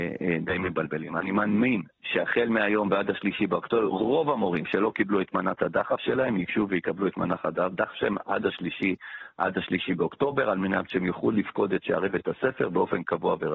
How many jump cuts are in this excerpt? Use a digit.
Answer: 0